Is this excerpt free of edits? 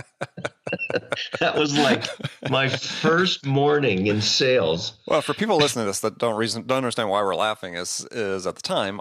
yes; 0 cuts

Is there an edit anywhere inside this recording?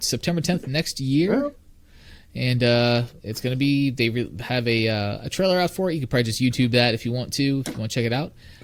no; 0 cuts

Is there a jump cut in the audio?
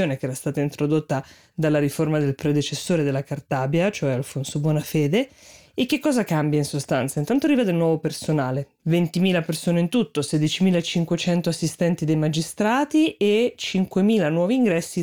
no; 0 cuts

